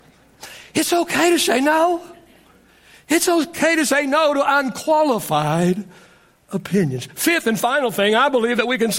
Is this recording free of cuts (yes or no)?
yes